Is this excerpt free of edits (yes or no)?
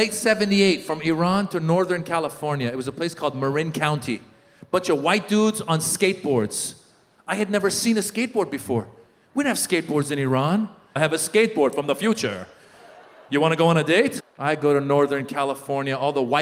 no